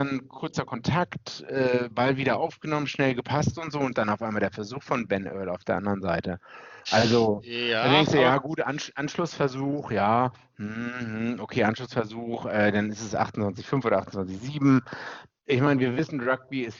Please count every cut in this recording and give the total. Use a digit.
2